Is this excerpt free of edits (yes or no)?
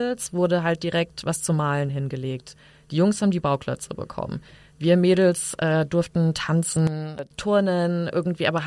yes